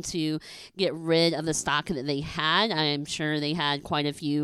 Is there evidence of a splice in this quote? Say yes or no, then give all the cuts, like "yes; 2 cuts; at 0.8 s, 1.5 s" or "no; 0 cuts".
no; 0 cuts